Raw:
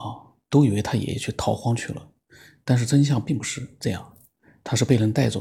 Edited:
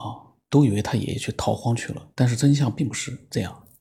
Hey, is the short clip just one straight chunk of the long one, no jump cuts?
no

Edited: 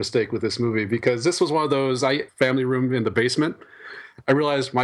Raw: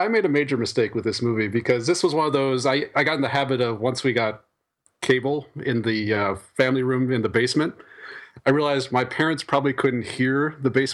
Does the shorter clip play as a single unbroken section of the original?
no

